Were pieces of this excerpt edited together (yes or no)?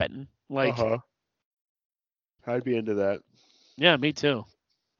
yes